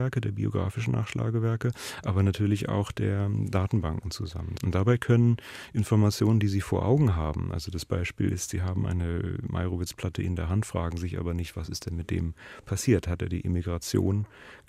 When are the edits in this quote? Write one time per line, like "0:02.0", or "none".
0:04.6